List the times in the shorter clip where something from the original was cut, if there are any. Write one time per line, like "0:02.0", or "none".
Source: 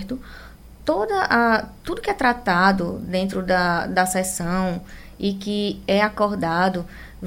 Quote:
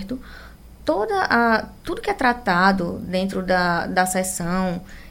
none